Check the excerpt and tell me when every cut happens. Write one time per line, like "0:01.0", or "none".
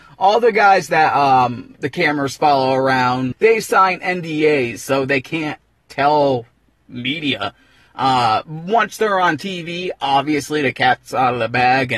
0:03.3